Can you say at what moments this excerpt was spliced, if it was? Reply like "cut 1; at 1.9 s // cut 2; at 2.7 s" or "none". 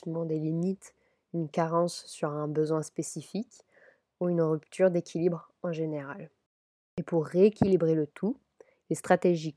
none

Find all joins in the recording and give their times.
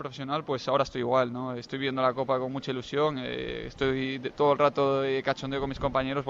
none

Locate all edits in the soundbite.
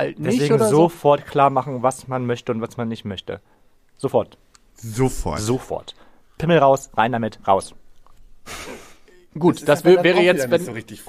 none

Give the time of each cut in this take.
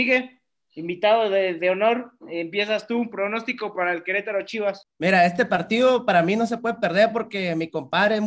none

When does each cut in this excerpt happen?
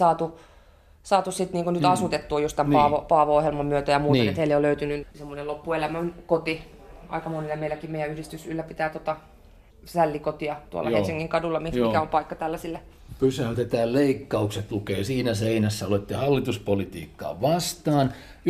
cut 1; at 5.1 s

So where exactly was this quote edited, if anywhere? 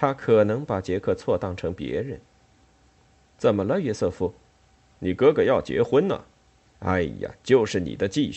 cut 1; at 4.9 s // cut 2; at 6.6 s

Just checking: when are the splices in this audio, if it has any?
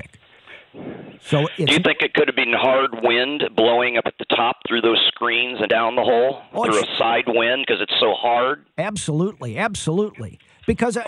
cut 1; at 5.7 s

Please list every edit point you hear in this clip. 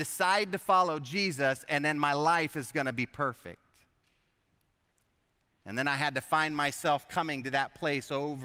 none

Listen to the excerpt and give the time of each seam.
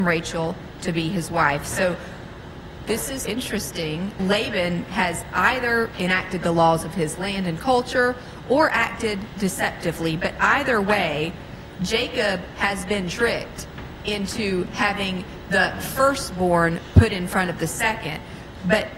cut 1; at 3.2 s

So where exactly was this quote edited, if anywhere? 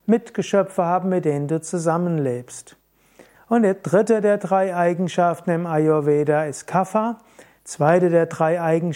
cut 1; at 3.3 s // cut 2; at 7.6 s

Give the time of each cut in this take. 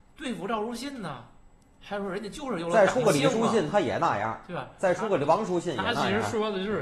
none

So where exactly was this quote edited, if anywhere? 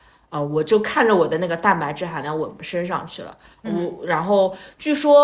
cut 1; at 2.6 s

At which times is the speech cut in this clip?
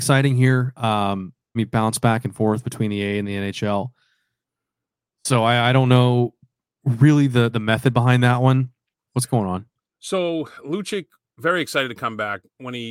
cut 1; at 1.6 s // cut 2; at 9.1 s

